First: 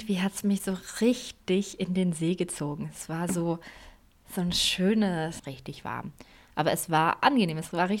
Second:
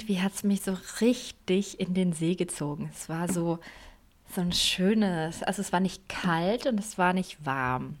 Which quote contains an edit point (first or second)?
first